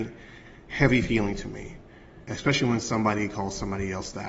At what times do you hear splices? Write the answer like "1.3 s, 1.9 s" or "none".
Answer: 2.2 s